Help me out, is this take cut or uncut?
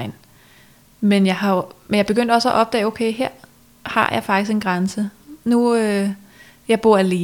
uncut